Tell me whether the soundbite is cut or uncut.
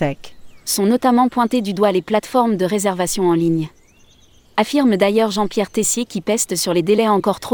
cut